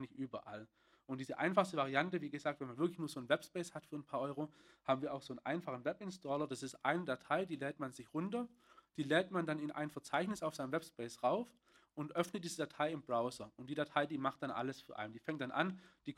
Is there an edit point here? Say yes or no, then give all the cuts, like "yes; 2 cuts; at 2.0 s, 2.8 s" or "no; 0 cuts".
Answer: no; 0 cuts